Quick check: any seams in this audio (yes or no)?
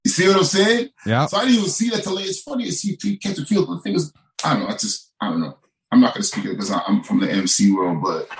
no